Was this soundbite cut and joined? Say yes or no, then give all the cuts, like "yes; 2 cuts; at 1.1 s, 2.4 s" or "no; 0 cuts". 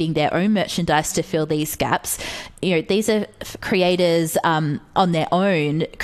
no; 0 cuts